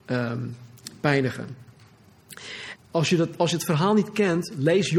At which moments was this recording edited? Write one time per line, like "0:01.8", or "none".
0:02.8